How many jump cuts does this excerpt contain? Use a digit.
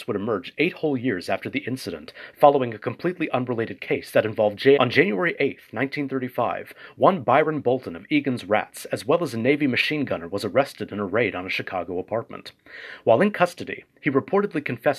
1